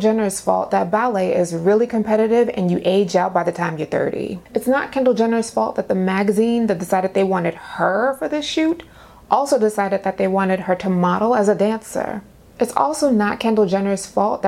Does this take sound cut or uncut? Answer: cut